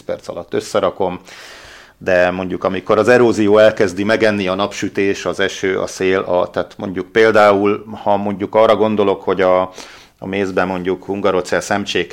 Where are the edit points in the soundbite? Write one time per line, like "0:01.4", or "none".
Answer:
none